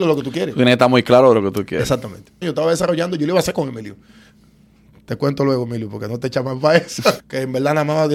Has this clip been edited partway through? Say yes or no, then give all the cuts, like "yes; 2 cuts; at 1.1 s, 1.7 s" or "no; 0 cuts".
yes; 2 cuts; at 2.4 s, 7.2 s